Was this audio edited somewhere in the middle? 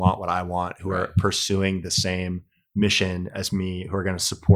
no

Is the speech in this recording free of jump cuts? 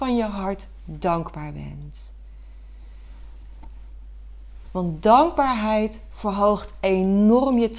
no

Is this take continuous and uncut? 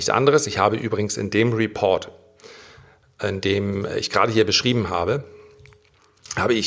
yes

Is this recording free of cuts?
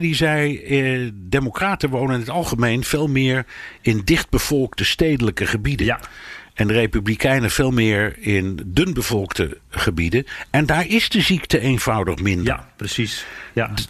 yes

